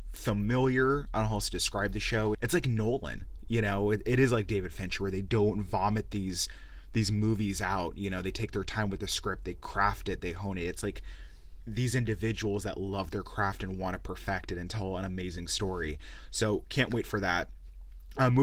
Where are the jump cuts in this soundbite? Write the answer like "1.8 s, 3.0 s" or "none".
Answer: 2.3 s